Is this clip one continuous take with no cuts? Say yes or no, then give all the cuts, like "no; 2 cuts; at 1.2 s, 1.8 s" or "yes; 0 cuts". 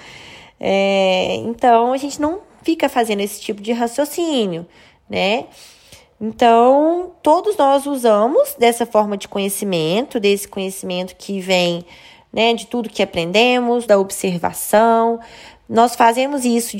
no; 1 cut; at 13.9 s